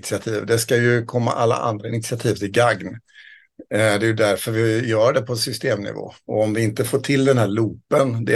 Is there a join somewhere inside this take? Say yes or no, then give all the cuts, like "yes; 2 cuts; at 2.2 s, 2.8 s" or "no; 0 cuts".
no; 0 cuts